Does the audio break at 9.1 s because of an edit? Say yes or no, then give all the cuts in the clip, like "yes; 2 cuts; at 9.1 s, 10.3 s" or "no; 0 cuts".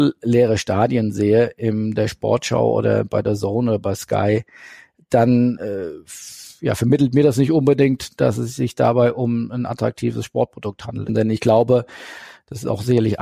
no; 1 cut; at 11.1 s